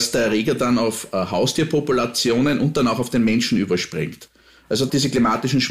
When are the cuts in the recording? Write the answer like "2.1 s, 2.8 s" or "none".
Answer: none